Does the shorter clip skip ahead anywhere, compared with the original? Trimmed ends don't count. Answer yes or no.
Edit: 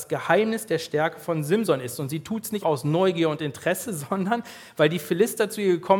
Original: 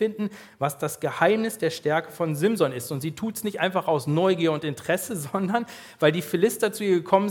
yes